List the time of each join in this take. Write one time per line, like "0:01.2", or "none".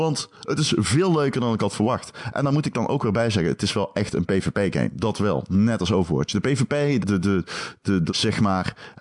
0:07.0
0:08.1

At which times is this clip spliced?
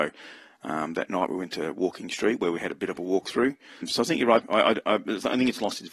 0:04.4

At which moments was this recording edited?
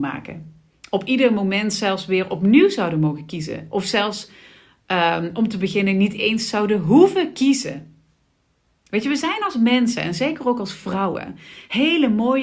none

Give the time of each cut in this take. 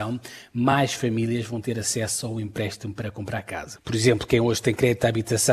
0:03.8

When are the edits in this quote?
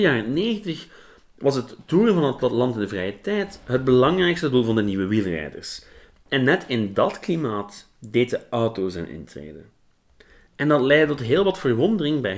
0:10.5

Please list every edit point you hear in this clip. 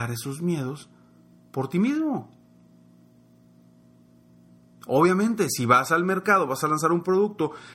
none

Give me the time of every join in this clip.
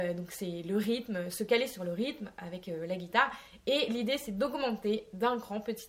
none

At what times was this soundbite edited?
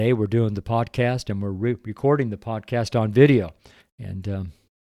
0:03.8

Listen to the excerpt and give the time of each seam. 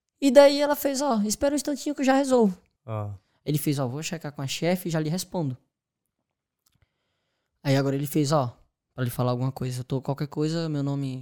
0:02.8
0:08.8

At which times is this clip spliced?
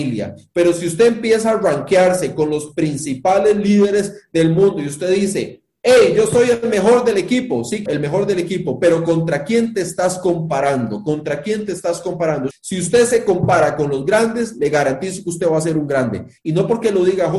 0:07.9
0:12.5
0:16.4

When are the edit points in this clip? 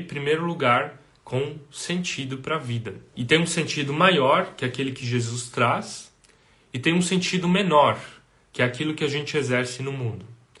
0:03.1

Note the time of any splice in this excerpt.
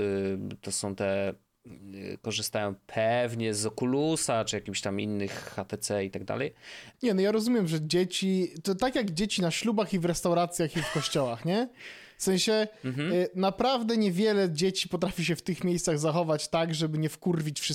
0:06.9
0:08.6

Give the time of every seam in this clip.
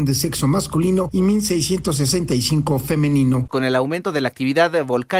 0:03.5

